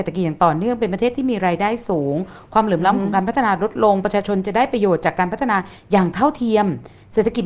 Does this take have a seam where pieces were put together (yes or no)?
no